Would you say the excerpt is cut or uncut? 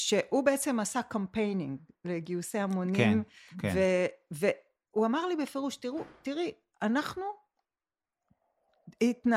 uncut